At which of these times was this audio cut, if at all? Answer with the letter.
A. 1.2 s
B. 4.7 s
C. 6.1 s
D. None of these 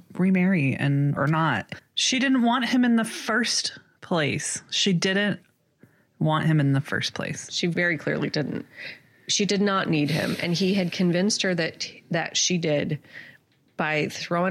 A